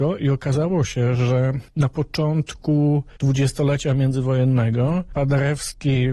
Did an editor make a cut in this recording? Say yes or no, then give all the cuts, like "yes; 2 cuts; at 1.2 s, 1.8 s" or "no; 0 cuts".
no; 0 cuts